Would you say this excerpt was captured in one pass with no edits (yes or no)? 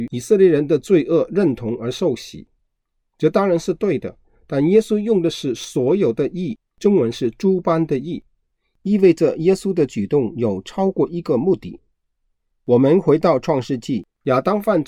yes